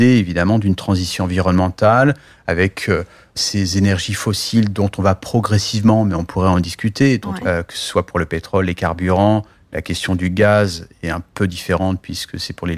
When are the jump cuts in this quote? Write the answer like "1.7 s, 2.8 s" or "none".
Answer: 7.4 s